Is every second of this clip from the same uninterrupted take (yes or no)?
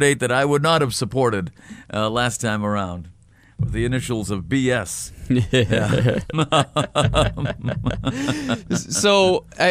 yes